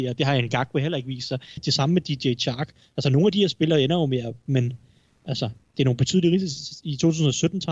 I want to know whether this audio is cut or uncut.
cut